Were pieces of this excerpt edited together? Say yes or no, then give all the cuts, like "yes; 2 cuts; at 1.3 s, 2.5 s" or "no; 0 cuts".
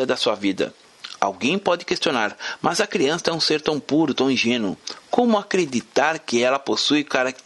no; 0 cuts